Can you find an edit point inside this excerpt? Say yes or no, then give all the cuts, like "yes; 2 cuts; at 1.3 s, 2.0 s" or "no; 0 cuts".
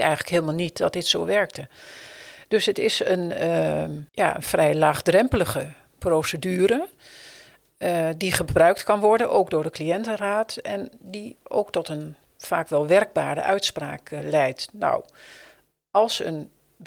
yes; 1 cut; at 4.1 s